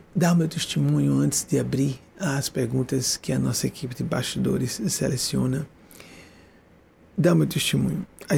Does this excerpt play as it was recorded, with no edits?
yes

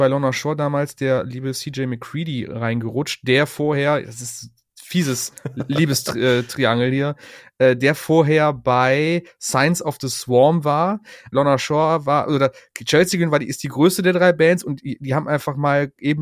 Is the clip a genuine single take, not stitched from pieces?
no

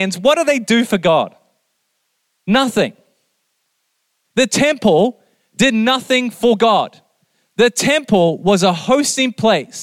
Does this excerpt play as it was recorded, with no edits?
no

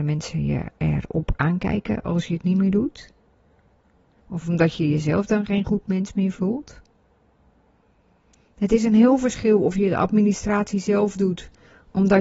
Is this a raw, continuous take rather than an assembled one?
yes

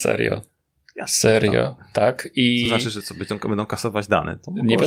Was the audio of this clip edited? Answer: no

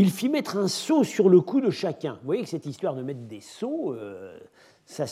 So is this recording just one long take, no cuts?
yes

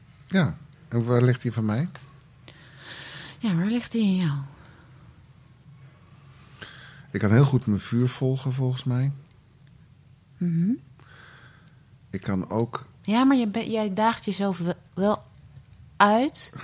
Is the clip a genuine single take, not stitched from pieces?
yes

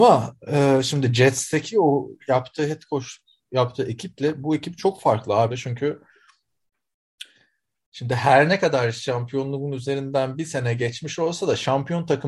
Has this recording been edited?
yes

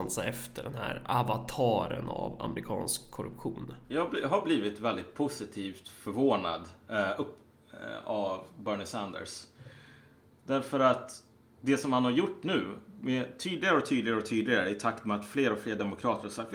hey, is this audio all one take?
no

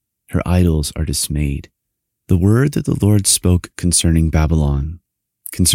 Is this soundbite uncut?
no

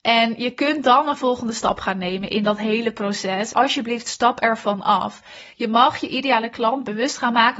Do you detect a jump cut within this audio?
yes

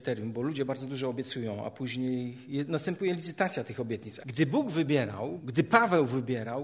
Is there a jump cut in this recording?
yes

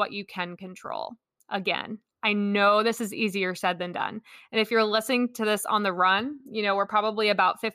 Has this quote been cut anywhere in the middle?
no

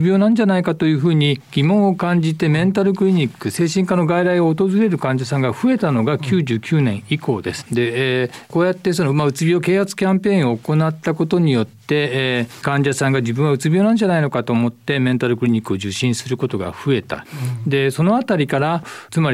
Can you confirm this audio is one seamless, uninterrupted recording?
no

